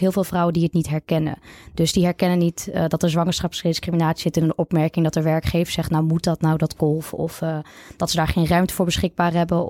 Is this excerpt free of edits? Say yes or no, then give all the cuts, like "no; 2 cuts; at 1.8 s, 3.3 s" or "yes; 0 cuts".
yes; 0 cuts